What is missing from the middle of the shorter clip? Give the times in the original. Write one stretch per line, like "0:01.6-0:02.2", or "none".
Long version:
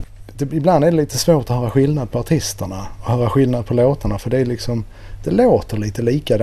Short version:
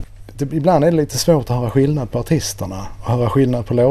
none